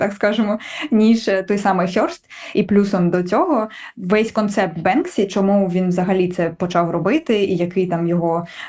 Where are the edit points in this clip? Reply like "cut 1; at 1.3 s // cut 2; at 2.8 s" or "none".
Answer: none

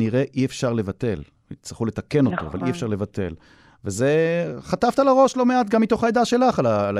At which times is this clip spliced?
none

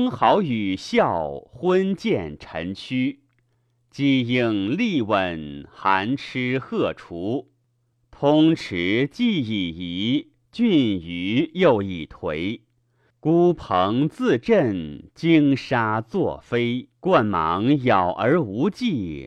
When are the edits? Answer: cut 1; at 7.9 s // cut 2; at 13.1 s // cut 3; at 17.0 s

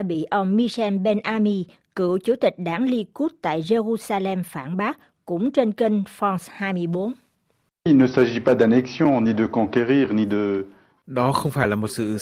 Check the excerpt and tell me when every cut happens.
none

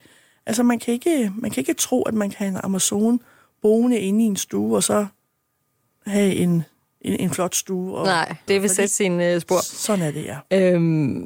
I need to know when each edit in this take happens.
cut 1; at 8.5 s

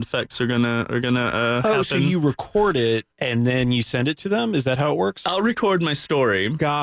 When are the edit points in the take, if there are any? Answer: cut 1; at 3.1 s

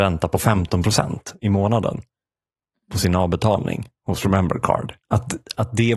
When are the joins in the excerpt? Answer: cut 1; at 5.0 s

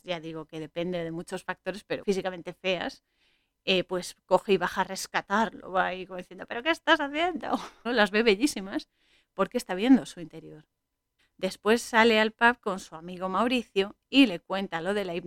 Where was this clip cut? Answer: cut 1; at 2.0 s // cut 2; at 7.9 s // cut 3; at 11.2 s

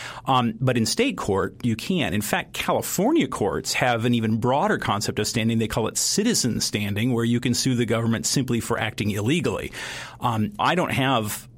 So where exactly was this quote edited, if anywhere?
cut 1; at 10.6 s

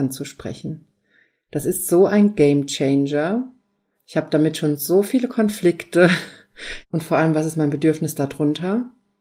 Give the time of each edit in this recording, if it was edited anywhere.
cut 1; at 3.9 s // cut 2; at 6.8 s

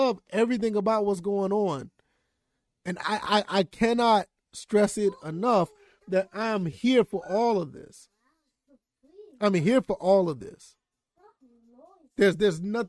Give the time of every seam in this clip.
none

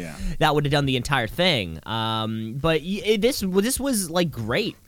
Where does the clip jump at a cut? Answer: none

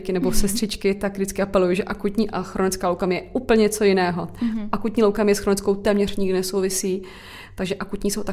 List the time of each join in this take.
none

